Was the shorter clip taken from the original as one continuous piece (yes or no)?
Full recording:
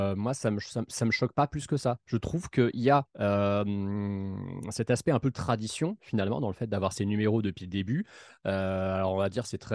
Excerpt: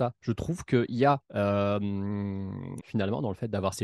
no